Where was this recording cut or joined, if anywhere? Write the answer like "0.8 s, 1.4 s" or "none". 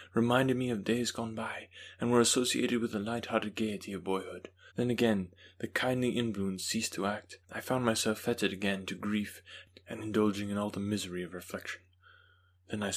4.7 s, 7.4 s